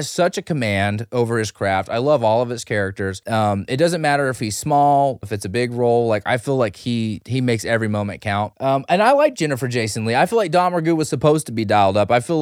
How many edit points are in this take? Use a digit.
1